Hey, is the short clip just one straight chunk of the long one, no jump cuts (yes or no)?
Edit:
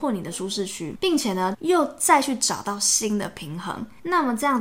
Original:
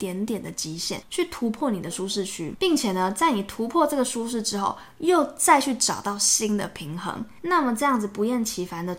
no